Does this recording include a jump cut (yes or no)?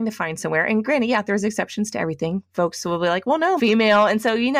yes